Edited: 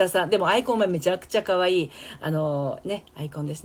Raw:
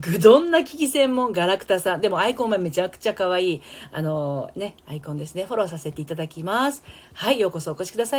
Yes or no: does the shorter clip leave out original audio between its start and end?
no